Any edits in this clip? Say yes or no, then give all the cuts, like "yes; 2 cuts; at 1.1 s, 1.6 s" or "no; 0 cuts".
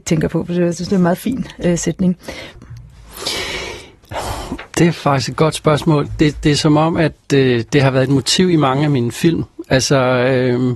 yes; 1 cut; at 2.6 s